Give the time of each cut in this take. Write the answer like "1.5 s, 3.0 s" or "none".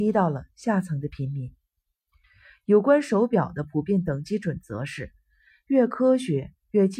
none

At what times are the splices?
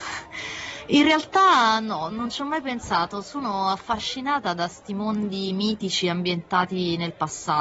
2.1 s

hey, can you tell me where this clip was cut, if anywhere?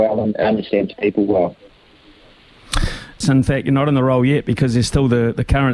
3.2 s

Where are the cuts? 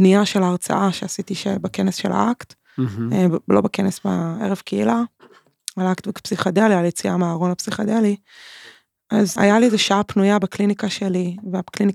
9.4 s

